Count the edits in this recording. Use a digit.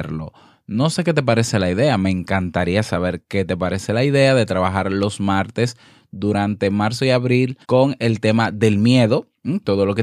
1